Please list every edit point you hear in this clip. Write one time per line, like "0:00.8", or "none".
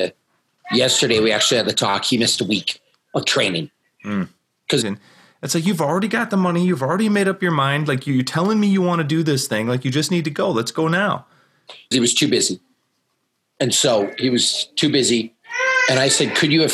0:04.8
0:11.9